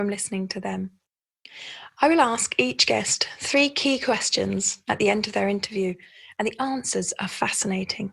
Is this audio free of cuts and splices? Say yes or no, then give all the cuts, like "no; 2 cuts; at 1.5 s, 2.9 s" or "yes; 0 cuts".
yes; 0 cuts